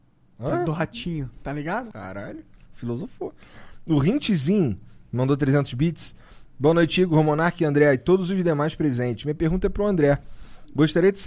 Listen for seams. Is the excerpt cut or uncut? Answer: cut